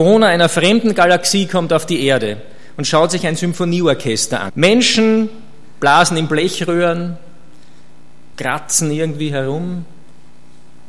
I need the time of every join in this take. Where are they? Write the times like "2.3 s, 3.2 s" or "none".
4.5 s, 8.3 s